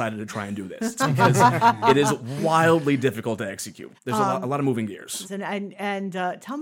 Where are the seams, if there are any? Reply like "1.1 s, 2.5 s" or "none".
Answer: 4.0 s, 5.2 s